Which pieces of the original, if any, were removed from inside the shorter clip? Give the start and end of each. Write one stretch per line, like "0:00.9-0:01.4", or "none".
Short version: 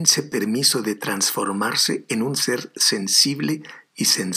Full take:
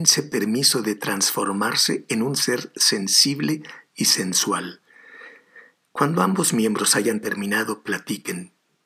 none